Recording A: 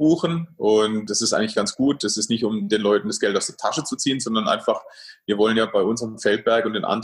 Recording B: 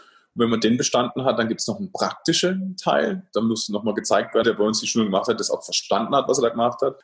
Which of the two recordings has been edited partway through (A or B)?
B